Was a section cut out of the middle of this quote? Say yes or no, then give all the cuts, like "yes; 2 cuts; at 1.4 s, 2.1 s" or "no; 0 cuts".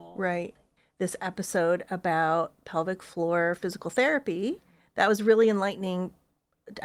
no; 0 cuts